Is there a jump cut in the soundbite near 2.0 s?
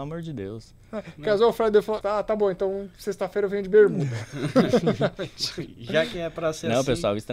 yes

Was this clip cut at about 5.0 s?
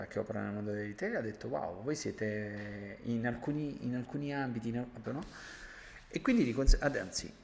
yes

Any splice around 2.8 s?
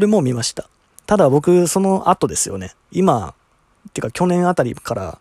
yes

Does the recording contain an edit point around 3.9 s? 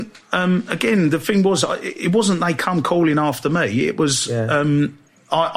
no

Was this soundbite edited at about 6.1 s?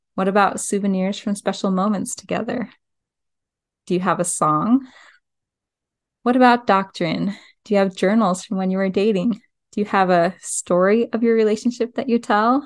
no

